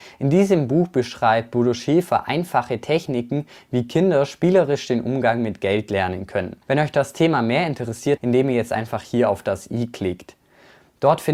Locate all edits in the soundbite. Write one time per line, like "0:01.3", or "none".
0:06.6
0:08.2